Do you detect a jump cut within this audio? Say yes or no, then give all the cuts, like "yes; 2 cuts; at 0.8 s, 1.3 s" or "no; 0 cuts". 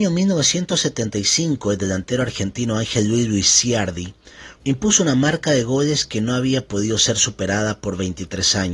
yes; 1 cut; at 4.6 s